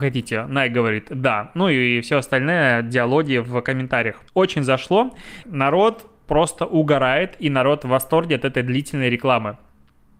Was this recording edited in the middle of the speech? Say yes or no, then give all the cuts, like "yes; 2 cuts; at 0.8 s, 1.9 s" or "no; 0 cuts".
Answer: yes; 2 cuts; at 4.3 s, 5.4 s